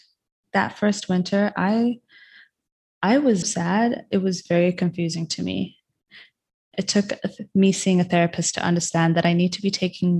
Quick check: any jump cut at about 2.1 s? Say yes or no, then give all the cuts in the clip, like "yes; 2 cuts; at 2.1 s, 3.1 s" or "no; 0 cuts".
no; 1 cut; at 3.4 s